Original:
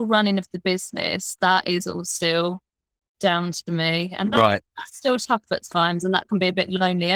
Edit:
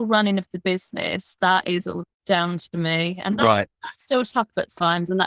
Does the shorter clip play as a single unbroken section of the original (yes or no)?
no